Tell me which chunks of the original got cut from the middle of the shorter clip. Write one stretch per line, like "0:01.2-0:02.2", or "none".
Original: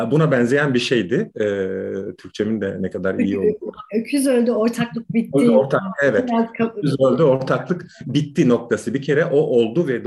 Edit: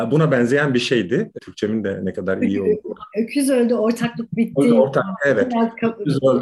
0:01.4-0:02.2